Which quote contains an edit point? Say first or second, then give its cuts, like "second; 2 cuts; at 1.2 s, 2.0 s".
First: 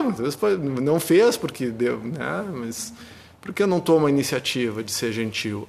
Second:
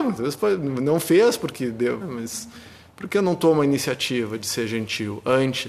second; 1 cut; at 2.0 s